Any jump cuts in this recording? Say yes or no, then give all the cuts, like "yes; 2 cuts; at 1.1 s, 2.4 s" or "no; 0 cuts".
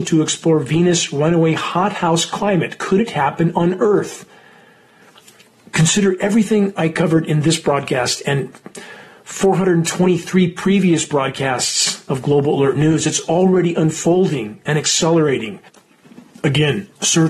no; 0 cuts